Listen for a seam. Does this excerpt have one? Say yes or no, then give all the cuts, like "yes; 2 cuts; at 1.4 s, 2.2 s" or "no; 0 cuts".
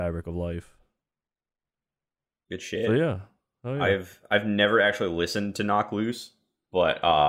no; 0 cuts